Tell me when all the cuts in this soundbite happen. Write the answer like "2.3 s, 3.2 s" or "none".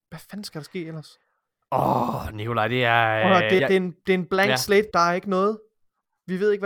3.6 s, 4.9 s